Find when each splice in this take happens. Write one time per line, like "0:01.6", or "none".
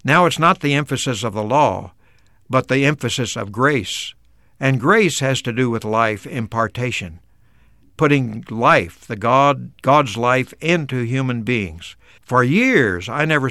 0:12.2